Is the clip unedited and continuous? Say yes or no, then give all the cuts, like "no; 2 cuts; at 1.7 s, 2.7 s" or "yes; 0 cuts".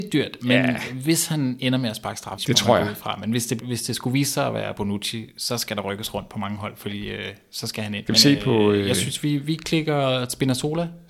no; 3 cuts; at 2.4 s, 3.6 s, 8.1 s